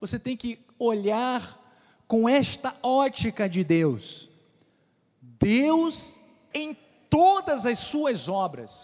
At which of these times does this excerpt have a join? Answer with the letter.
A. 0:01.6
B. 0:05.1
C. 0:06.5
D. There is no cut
C